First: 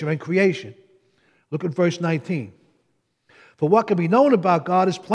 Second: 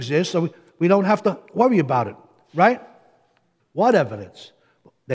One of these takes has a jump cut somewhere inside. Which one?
second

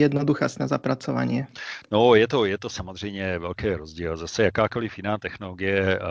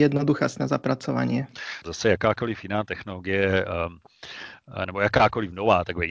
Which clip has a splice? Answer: second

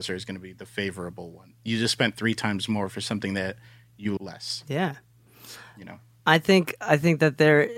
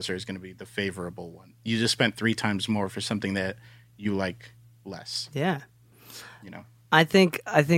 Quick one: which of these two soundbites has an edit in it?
first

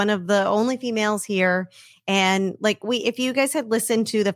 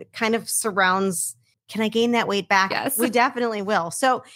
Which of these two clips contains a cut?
second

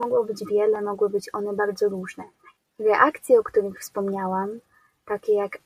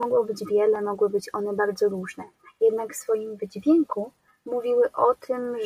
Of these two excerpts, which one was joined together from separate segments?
first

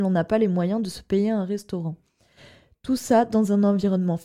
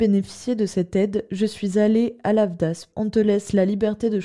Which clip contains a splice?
second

